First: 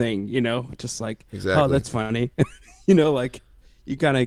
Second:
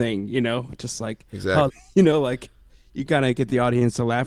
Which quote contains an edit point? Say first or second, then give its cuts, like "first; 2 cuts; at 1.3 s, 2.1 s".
second; 1 cut; at 1.7 s